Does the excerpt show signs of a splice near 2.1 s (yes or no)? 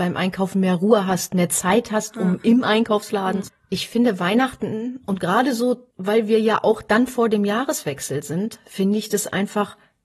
no